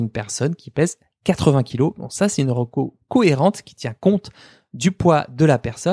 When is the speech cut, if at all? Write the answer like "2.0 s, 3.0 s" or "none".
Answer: none